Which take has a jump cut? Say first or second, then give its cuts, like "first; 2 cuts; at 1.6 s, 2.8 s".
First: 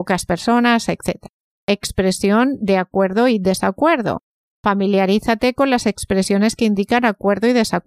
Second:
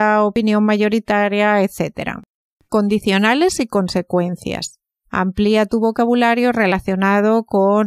second; 2 cuts; at 2.7 s, 5.0 s